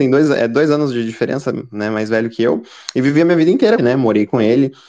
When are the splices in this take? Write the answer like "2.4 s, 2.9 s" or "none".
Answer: 3.8 s